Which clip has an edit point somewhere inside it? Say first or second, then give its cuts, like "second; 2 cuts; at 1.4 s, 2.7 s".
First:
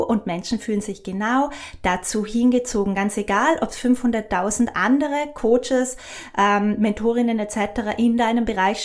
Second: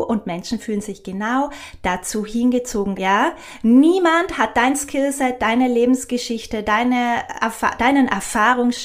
second; 1 cut; at 2.9 s